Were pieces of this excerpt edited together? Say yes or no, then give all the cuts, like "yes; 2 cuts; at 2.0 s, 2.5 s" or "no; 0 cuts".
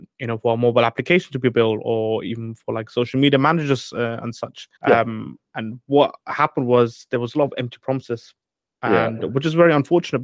yes; 1 cut; at 4.8 s